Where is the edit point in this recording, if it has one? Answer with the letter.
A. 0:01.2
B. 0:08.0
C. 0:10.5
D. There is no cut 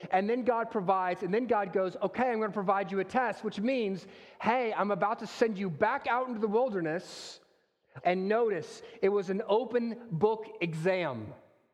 B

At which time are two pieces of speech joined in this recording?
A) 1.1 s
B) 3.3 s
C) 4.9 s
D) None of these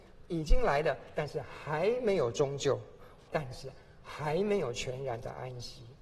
B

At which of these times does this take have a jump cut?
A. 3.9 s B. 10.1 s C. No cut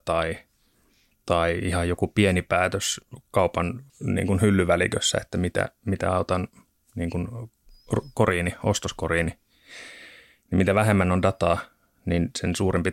A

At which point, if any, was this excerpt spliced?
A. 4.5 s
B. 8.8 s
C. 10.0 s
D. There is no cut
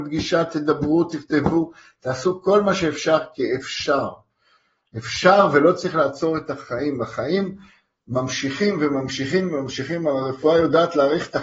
D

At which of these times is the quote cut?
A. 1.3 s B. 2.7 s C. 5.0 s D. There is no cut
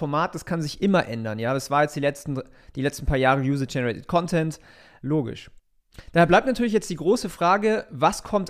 C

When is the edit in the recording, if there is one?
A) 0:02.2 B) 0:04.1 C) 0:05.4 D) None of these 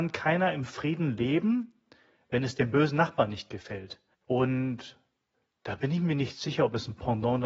B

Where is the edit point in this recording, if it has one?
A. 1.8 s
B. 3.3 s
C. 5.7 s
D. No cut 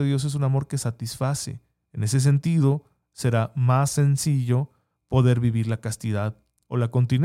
A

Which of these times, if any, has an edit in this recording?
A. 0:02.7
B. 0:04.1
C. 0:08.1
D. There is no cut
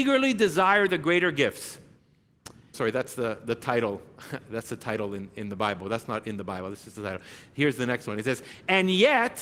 A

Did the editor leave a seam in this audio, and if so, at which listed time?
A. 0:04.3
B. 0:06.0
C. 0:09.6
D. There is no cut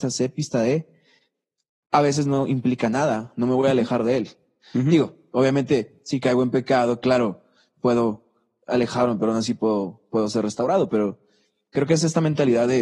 D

